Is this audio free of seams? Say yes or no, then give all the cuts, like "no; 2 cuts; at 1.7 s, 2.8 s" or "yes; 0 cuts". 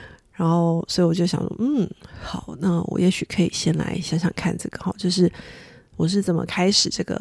yes; 0 cuts